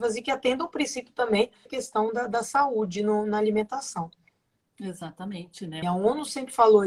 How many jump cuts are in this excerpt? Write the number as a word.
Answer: two